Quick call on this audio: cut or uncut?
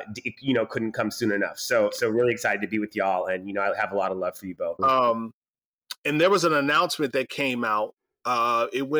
cut